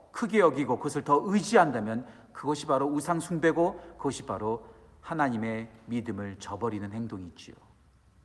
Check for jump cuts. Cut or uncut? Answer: uncut